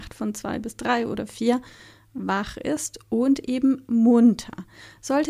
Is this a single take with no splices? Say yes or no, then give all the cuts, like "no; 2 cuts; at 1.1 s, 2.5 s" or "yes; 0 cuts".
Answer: yes; 0 cuts